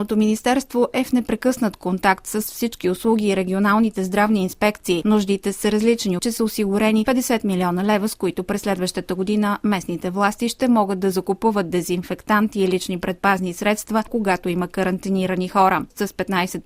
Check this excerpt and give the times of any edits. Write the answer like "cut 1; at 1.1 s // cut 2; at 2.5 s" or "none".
cut 1; at 6.2 s // cut 2; at 14.1 s